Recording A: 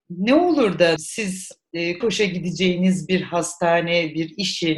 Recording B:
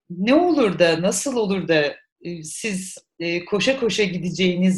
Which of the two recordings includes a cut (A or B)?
A